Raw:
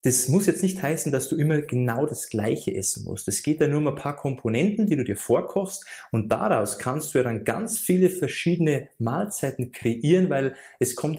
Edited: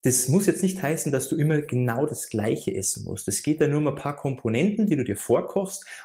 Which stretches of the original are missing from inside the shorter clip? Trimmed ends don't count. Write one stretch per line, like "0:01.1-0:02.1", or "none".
none